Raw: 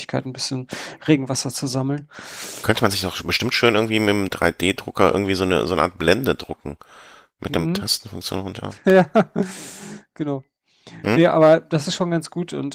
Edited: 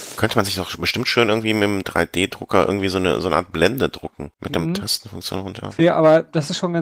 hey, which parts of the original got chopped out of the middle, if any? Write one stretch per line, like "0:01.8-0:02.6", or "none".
0:06.8-0:07.3
0:08.8-0:11.2

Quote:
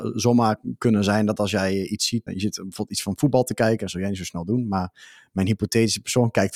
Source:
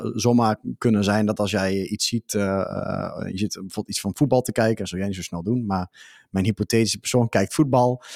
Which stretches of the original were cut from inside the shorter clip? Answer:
0:02.3-0:03.2

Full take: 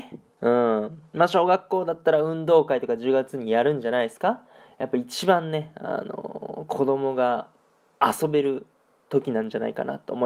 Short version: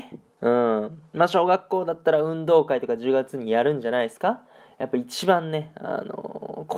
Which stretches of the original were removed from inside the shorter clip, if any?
none

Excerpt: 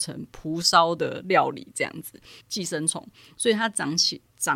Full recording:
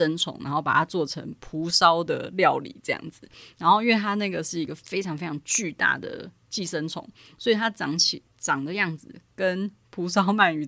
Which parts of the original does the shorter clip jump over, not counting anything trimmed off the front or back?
0:03.5-0:06.4

